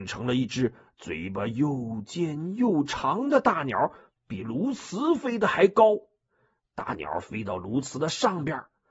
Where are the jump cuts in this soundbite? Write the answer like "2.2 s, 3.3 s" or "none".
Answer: none